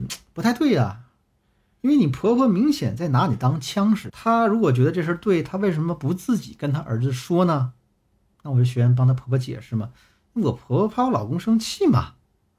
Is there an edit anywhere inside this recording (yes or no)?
yes